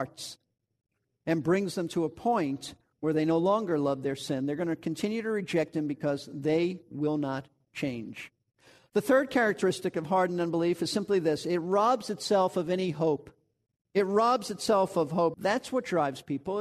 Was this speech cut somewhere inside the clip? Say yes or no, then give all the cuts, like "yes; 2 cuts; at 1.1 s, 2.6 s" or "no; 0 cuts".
yes; 1 cut; at 15.3 s